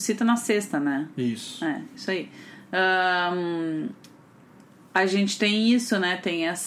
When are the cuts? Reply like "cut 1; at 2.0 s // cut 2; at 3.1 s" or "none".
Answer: none